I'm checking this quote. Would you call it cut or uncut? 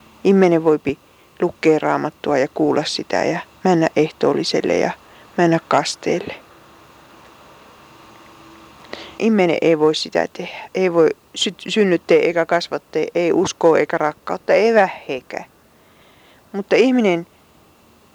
cut